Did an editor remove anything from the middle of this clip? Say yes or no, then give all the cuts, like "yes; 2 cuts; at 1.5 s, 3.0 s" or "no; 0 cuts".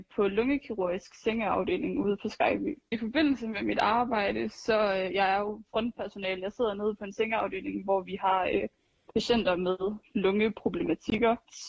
no; 0 cuts